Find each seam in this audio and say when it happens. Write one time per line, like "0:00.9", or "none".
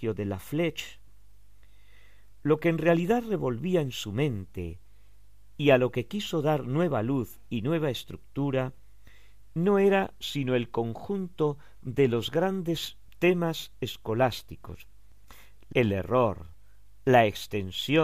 0:15.7